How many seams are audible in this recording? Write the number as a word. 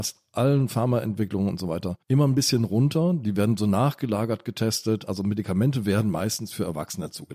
one